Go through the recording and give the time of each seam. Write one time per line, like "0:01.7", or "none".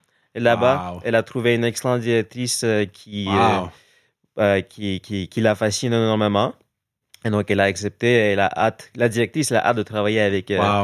none

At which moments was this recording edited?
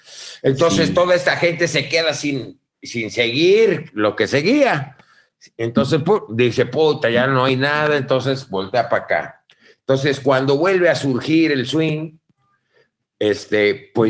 none

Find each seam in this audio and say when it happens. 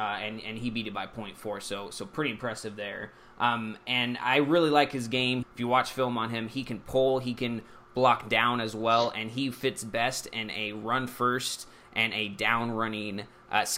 0:05.4

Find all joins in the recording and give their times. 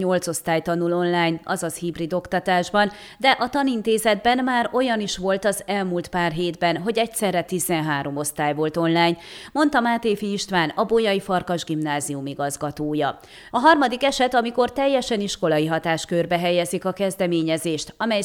0:13.5

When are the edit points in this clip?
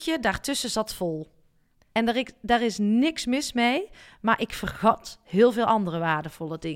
0:01.9

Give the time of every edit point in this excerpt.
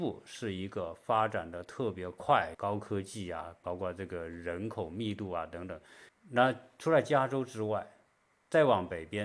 0:02.5
0:06.1

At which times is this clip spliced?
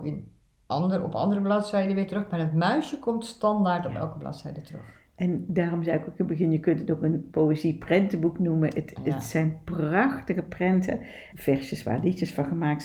0:11.3

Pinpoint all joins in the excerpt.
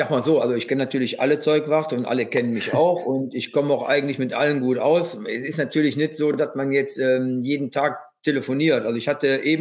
none

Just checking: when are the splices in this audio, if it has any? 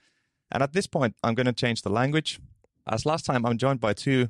0:02.9

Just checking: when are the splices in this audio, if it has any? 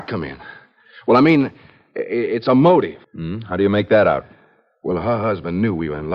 0:03.0

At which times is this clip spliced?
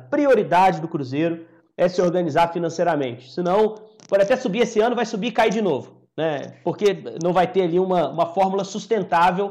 0:08.1

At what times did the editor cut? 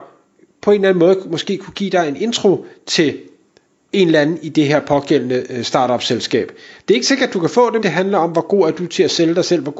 0:06.8
0:07.8

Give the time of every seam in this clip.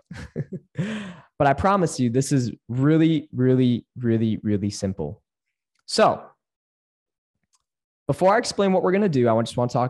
none

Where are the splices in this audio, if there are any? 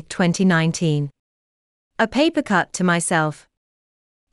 none

